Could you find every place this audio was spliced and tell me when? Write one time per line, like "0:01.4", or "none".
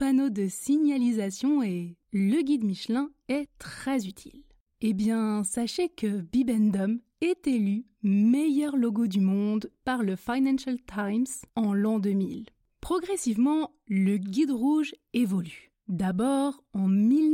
0:02.0
0:04.6